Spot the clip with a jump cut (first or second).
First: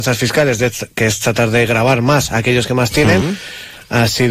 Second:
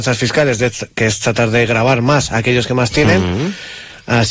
first